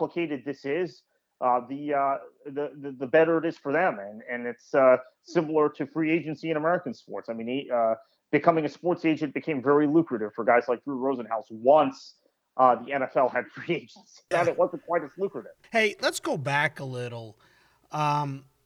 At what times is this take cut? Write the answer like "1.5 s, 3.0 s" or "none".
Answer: 14.3 s, 15.6 s